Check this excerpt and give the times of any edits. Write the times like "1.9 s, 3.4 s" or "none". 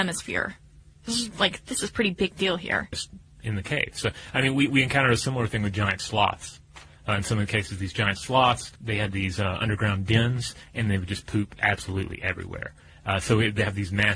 2.9 s, 8.8 s